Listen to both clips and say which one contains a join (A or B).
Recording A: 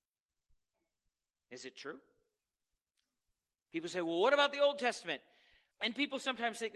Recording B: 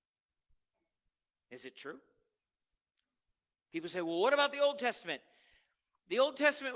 A